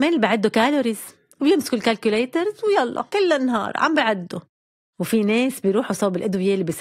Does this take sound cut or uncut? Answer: cut